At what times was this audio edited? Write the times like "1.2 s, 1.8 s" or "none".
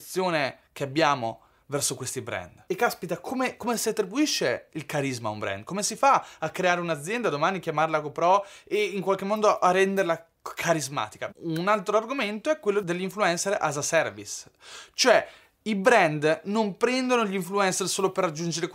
11.3 s